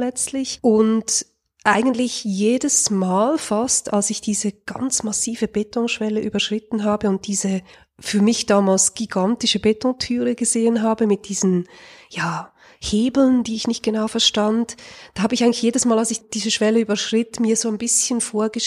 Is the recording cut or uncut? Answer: uncut